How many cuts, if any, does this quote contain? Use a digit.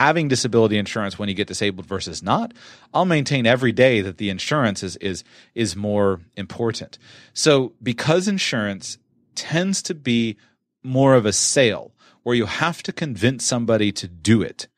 0